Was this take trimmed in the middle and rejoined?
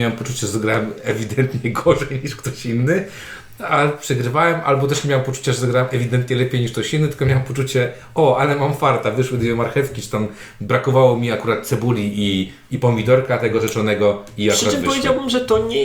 no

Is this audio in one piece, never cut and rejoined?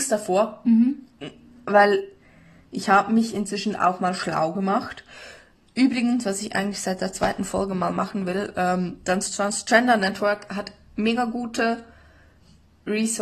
yes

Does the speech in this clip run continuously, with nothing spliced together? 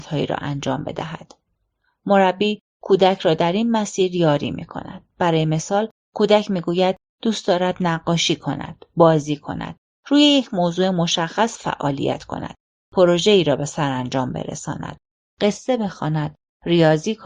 yes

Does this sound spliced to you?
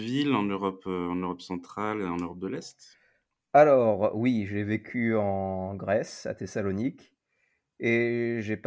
no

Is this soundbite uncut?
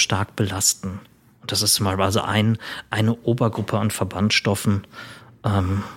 yes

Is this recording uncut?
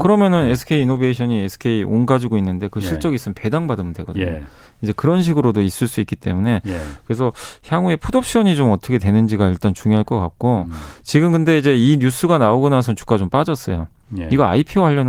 yes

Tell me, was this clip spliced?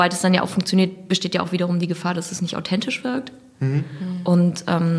no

